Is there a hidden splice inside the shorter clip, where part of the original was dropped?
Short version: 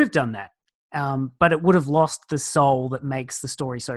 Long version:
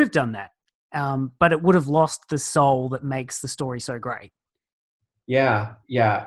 no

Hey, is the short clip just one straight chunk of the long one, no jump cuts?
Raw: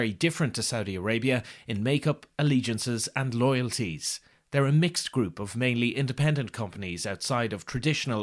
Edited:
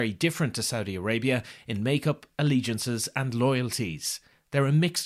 yes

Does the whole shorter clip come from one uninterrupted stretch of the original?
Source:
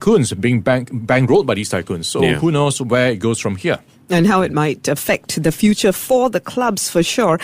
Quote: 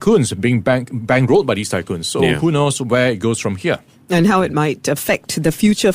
yes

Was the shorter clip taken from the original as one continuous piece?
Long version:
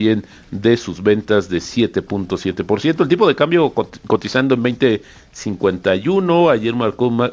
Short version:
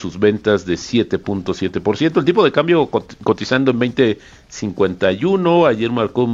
yes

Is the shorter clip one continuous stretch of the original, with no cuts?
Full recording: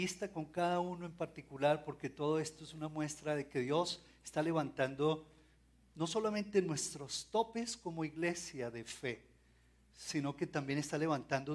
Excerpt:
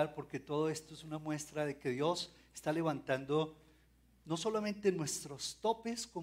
yes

